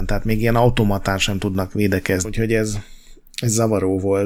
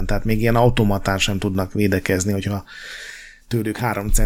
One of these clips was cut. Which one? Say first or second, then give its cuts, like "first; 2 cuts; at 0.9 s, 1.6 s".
first; 1 cut; at 2.2 s